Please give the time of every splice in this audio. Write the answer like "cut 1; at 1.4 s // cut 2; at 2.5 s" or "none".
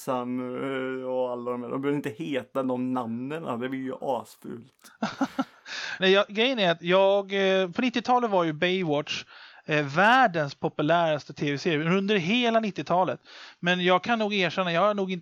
cut 1; at 6.0 s

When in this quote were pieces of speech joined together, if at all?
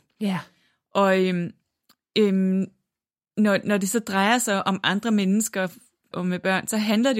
cut 1; at 6.1 s

